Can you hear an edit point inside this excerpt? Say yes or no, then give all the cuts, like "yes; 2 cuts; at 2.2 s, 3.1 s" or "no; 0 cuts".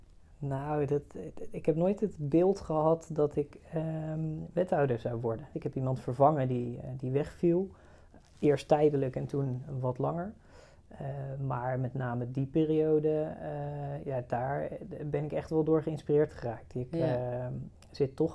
yes; 1 cut; at 5.5 s